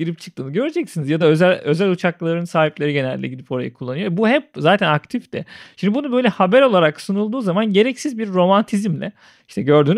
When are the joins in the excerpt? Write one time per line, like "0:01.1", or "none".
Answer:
none

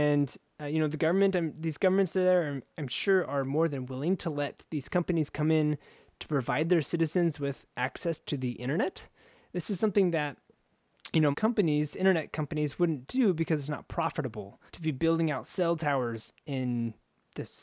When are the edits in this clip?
0:11.3
0:14.7

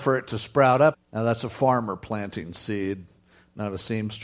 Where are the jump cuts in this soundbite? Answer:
0:00.9

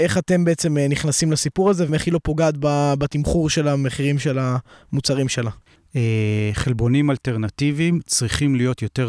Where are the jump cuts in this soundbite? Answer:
0:01.9
0:05.8

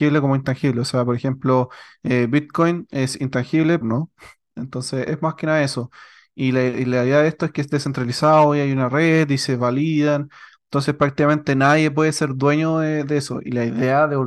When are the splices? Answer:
0:03.8

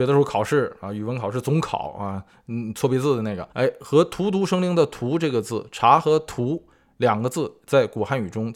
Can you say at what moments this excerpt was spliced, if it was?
0:03.5

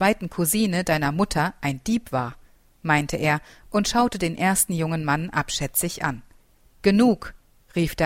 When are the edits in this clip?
0:06.6

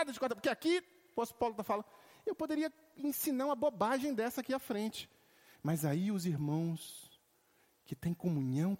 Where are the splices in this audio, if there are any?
none

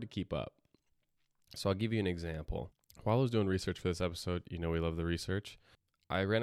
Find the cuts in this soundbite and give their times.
none

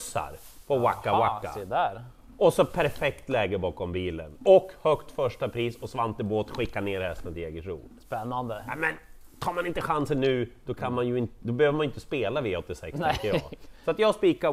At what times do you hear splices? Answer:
none

